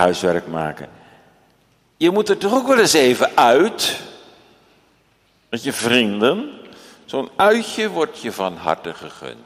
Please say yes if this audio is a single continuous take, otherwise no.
yes